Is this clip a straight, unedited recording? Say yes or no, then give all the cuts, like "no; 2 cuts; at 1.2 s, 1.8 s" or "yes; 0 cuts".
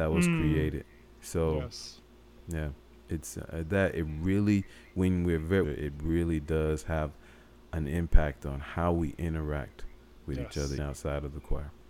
no; 2 cuts; at 5.6 s, 10.8 s